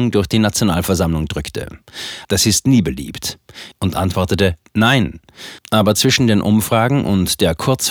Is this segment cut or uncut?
cut